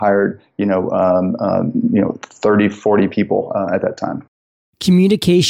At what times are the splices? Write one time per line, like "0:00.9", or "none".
none